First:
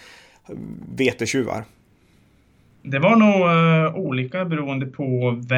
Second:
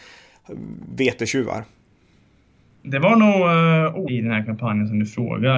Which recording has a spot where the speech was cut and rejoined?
second; 1 cut; at 4.1 s

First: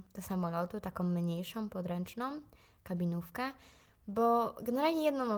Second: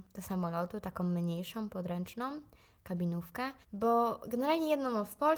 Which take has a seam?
second; 1 cut; at 3.6 s

